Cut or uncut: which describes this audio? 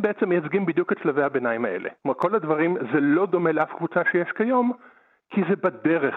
cut